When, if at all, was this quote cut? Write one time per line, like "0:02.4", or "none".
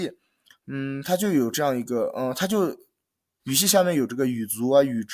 0:03.4

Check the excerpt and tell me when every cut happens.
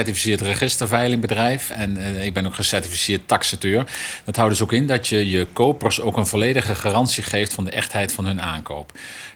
none

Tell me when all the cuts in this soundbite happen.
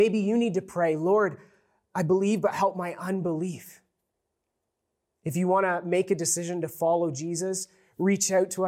none

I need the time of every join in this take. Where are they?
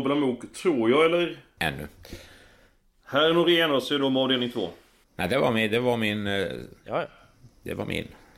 0:01.6
0:05.0

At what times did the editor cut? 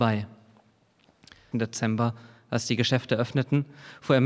0:01.5

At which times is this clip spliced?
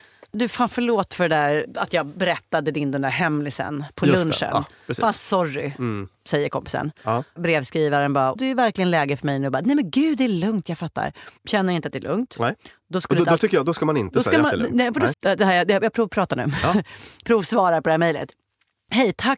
0:08.4
0:15.1

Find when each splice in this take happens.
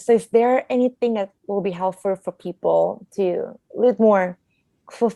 0:03.7

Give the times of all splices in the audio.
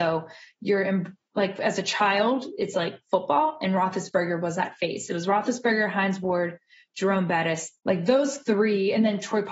0:07.8

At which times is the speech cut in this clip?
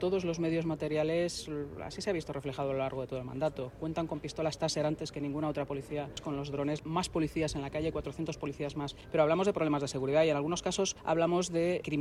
0:06.8

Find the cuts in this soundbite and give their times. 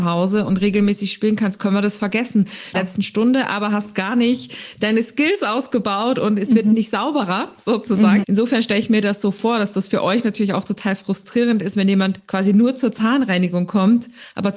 0:02.7
0:08.2

